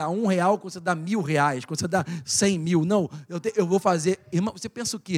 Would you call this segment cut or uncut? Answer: uncut